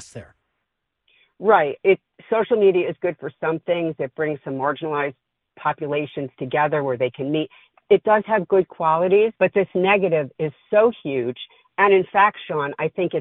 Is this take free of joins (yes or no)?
no